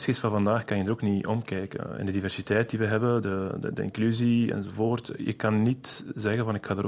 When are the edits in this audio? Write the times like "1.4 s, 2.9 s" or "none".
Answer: none

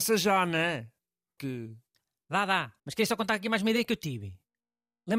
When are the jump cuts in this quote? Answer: 1.4 s, 2.8 s

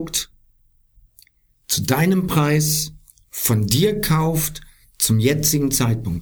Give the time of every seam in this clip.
none

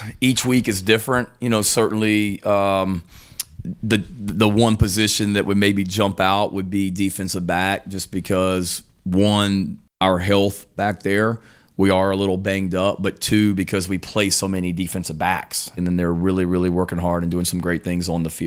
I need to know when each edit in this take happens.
15.8 s

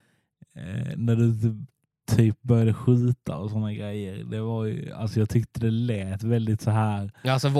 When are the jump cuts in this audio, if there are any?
none

